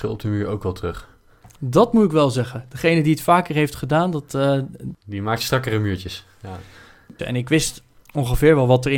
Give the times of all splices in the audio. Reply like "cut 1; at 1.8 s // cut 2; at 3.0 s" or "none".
cut 1; at 7.2 s

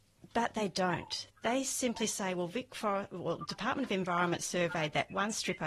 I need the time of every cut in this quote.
none

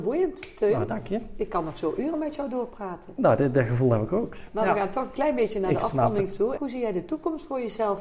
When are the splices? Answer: cut 1; at 4.5 s // cut 2; at 6.6 s

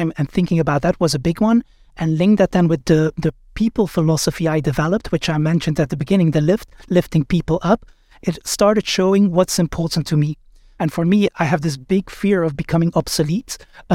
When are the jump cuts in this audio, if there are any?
cut 1; at 10.8 s

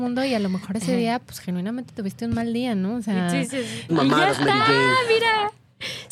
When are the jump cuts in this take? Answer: cut 1; at 3.9 s

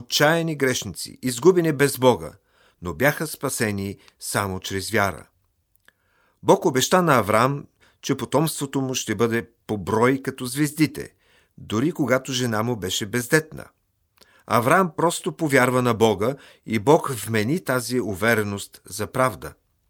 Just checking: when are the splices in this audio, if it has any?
none

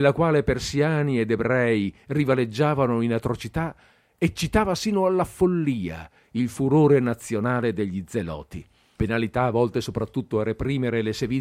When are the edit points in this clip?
cut 1; at 9.0 s

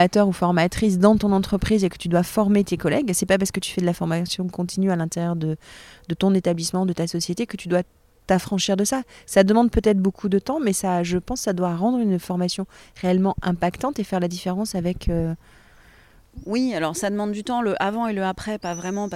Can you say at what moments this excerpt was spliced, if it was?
none

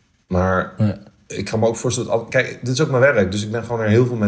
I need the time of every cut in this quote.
none

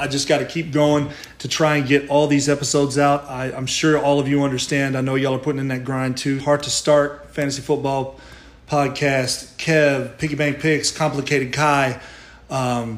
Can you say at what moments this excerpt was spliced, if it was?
cut 1; at 6.4 s

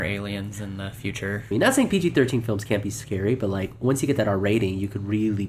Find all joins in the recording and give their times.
cut 1; at 1.5 s

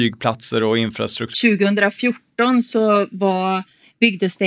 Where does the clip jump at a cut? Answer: cut 1; at 1.3 s

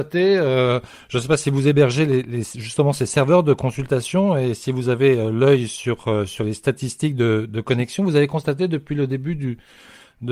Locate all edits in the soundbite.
none

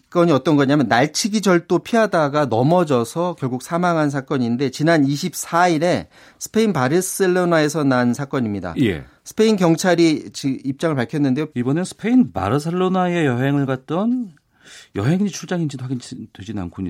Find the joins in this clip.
cut 1; at 11.5 s

